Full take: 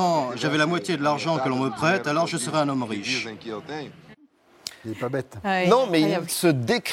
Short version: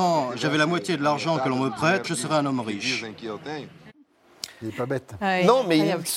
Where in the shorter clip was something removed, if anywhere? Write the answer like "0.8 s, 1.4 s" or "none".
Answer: 2.0 s